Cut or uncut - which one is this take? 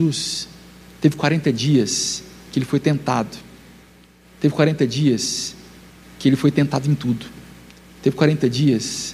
uncut